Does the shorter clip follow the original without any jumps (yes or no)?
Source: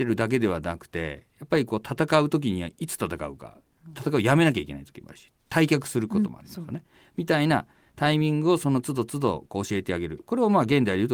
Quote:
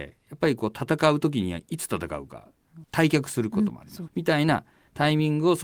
no